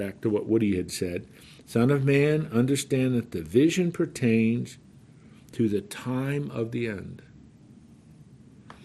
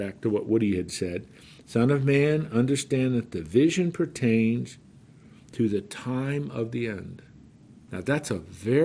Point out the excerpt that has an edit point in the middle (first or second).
second